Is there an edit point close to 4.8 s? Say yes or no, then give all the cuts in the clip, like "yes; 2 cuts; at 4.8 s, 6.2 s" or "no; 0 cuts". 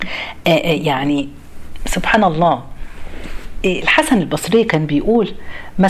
no; 0 cuts